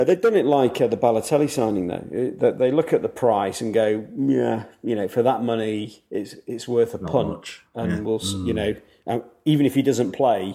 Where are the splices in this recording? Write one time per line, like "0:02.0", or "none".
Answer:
none

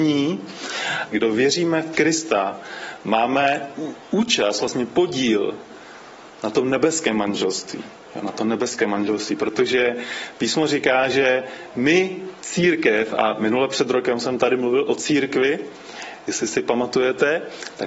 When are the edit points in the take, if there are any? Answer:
0:01.1

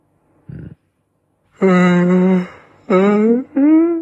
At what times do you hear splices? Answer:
0:01.4

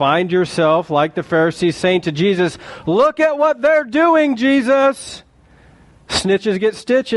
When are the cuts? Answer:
none

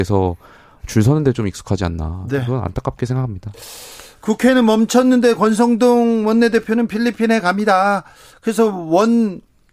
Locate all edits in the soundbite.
none

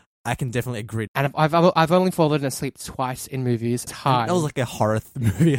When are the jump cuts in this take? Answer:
0:01.1
0:03.9

